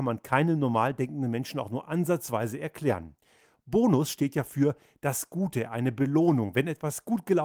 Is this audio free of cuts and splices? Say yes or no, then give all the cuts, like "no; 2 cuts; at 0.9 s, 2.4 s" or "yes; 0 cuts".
yes; 0 cuts